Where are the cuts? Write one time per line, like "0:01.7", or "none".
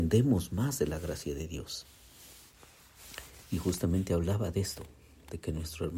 none